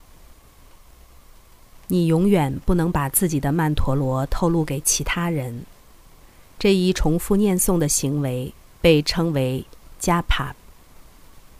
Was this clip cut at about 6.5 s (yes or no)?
no